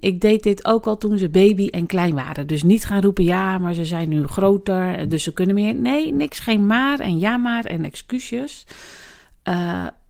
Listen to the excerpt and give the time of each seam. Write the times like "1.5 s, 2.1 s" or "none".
none